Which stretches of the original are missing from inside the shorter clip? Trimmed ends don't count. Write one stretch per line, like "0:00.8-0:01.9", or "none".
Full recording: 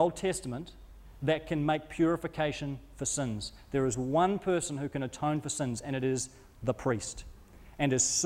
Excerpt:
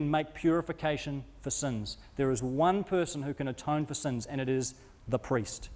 none